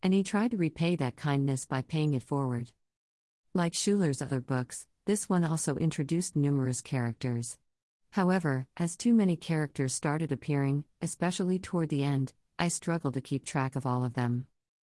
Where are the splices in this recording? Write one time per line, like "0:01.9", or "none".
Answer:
0:08.0